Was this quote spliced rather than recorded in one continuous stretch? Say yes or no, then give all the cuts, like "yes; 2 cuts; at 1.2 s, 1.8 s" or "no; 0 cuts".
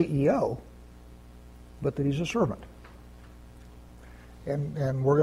no; 0 cuts